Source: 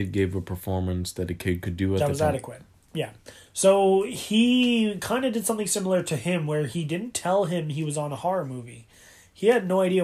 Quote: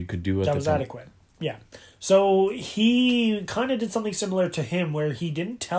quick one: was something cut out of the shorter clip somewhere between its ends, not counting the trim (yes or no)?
no